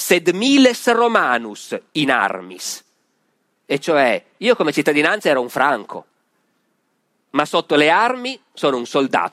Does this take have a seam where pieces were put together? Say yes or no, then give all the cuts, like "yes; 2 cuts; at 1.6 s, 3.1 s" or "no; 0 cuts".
no; 0 cuts